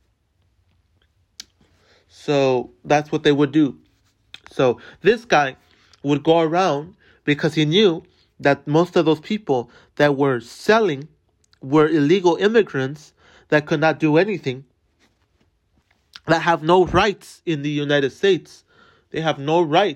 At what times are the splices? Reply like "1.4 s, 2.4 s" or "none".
none